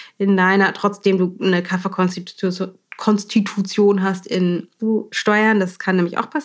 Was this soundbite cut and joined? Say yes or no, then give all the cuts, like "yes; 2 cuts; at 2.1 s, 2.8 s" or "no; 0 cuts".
yes; 1 cut; at 4.8 s